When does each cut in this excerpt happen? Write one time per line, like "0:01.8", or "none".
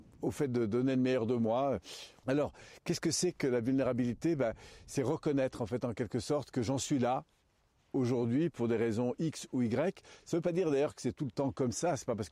0:02.2